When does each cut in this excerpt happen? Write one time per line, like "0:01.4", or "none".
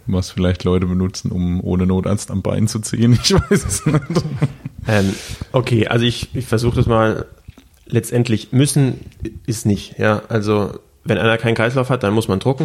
none